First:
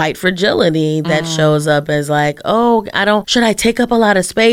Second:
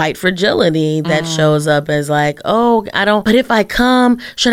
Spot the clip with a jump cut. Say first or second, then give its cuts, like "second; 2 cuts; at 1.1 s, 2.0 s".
first; 1 cut; at 3.2 s